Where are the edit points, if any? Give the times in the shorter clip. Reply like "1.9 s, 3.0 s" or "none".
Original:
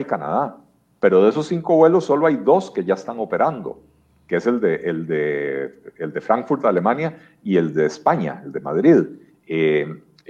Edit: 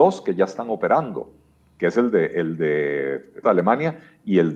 3.4 s